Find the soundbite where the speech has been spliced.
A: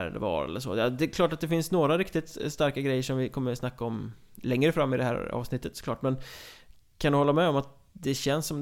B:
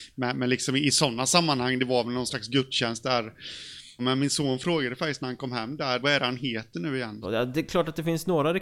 B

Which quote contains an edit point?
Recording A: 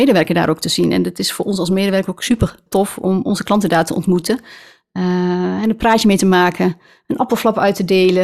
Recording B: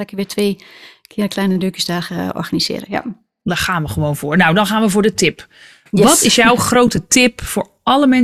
A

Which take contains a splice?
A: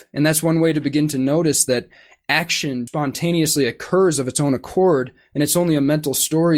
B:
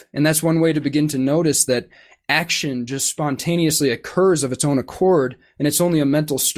A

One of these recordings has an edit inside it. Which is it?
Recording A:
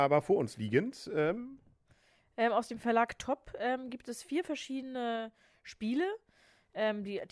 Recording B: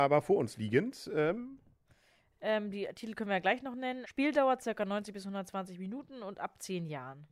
B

